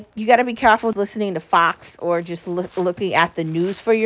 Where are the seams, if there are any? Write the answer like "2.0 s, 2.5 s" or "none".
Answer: 0.9 s